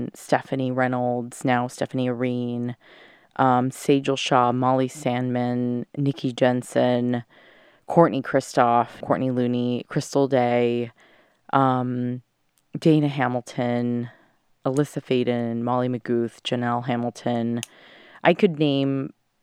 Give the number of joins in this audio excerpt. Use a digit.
1